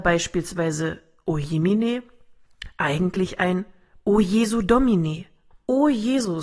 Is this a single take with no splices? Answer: no; 1 cut; at 5.5 s

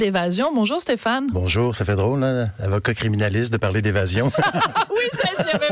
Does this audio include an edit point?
no; 0 cuts

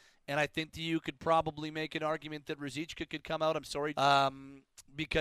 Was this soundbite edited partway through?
yes; 1 cut; at 3.9 s

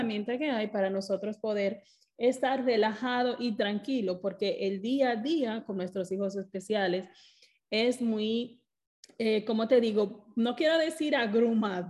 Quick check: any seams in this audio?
no; 0 cuts

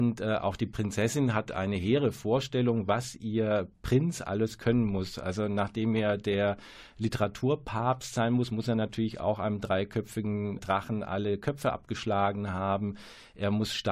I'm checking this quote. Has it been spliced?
yes; 1 cut; at 10.6 s

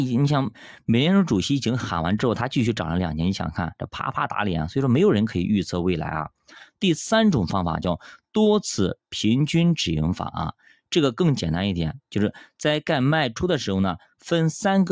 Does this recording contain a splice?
no; 0 cuts

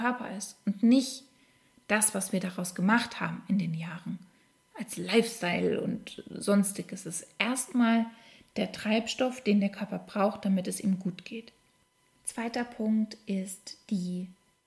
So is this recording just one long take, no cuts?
yes; 0 cuts

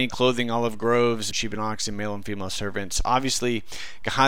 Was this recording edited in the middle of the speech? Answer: yes; 1 cut; at 1.3 s

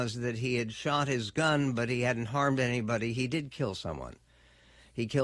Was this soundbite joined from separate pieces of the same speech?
no; 0 cuts

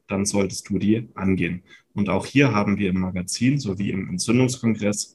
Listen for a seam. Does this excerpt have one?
no; 0 cuts

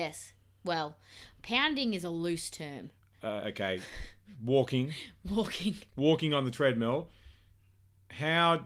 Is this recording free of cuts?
yes; 0 cuts

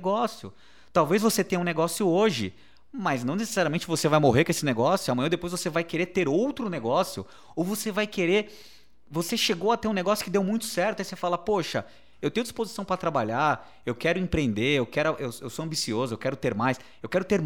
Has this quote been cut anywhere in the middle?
no; 0 cuts

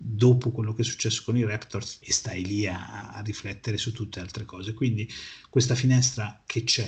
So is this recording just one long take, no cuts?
no; 1 cut; at 2.0 s

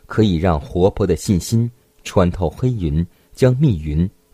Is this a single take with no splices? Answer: yes; 0 cuts

